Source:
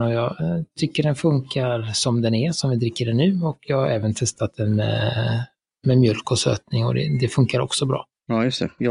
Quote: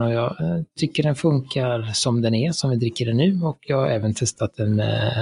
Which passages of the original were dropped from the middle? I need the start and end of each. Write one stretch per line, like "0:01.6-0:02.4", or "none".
none